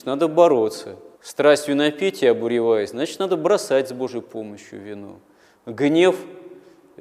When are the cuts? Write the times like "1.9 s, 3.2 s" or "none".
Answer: 1.1 s